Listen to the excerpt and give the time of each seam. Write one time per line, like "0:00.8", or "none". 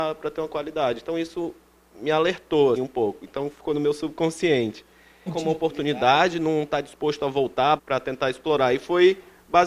0:02.7
0:05.3
0:07.8